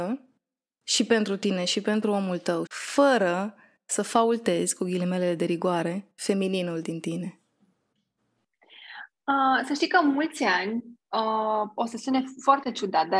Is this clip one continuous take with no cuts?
no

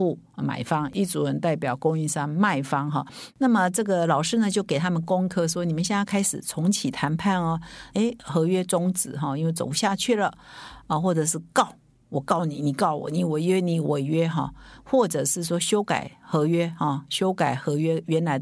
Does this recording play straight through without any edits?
no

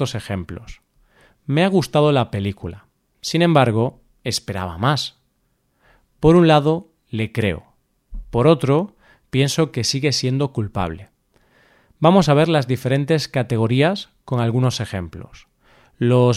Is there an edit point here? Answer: no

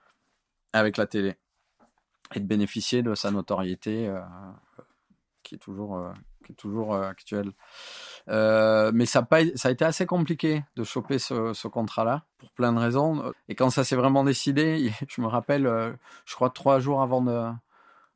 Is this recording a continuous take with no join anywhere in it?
no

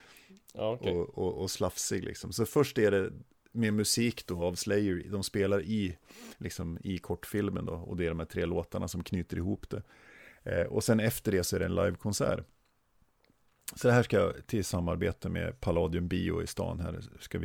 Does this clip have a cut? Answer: no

